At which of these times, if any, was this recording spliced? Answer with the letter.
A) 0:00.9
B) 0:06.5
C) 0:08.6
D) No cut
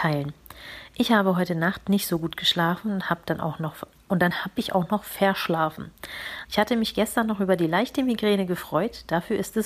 B